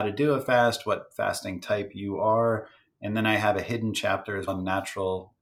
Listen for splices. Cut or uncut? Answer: cut